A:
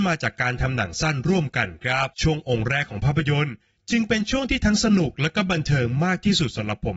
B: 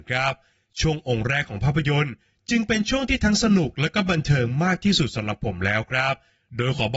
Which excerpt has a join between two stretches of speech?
A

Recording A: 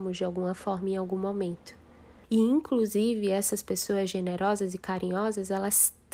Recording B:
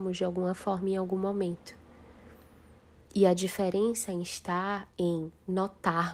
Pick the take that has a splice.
A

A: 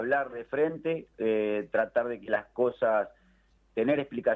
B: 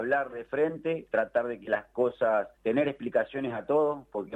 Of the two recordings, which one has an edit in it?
B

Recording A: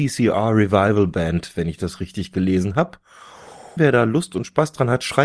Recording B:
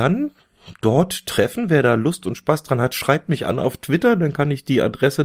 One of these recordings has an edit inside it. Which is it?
A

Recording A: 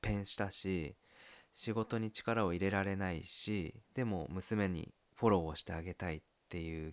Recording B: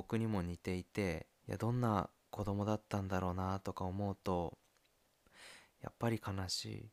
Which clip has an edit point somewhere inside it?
B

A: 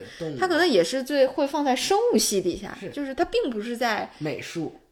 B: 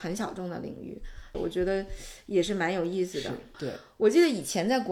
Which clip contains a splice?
B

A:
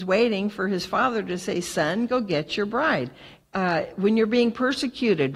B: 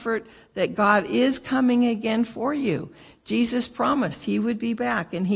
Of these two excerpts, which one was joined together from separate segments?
A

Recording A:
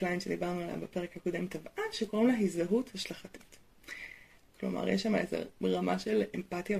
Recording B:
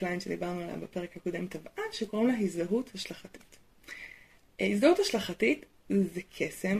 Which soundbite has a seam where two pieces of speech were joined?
A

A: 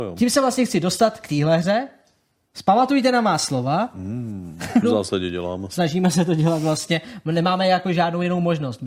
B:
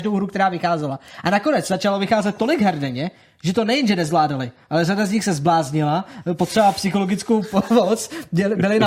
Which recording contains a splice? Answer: A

